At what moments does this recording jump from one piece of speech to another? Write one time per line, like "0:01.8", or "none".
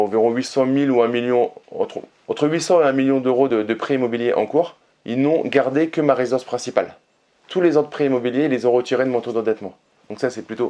none